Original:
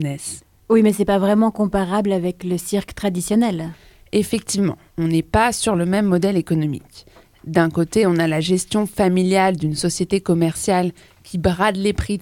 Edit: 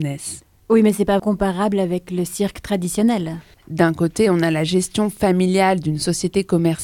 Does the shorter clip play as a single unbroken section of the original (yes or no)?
no